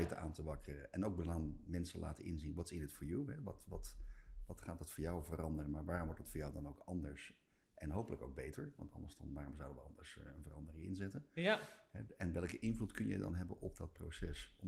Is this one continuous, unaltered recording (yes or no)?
yes